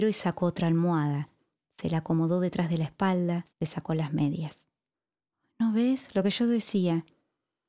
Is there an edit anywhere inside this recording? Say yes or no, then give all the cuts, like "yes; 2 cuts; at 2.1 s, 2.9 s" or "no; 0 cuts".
yes; 1 cut; at 3.5 s